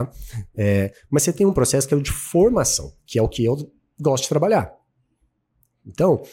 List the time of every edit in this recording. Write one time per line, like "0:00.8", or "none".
0:03.0